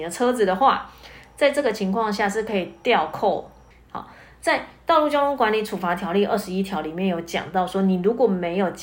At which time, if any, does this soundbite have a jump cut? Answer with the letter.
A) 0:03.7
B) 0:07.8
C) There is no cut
A